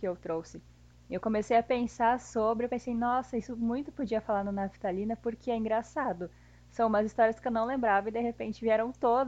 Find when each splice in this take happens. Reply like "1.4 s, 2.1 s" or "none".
none